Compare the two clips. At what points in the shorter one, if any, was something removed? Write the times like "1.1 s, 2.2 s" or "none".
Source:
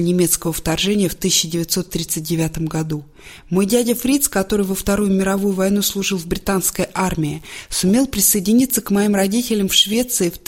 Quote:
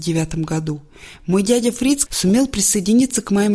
2.1 s